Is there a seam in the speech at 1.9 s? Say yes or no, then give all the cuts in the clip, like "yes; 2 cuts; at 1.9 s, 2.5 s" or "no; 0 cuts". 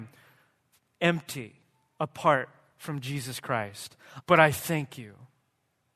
no; 1 cut; at 4.2 s